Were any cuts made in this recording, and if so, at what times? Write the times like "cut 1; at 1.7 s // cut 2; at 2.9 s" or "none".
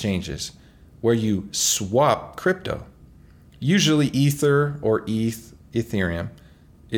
none